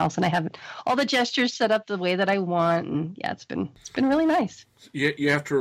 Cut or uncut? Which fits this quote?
uncut